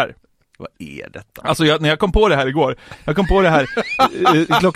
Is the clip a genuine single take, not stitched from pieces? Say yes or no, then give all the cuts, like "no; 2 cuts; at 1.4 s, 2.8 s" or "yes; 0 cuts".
yes; 0 cuts